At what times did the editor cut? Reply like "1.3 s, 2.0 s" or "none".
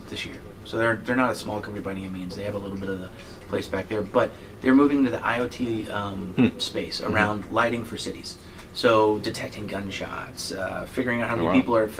none